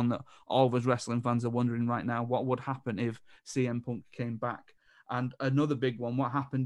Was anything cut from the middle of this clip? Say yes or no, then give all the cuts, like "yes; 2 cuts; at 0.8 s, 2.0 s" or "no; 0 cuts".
no; 0 cuts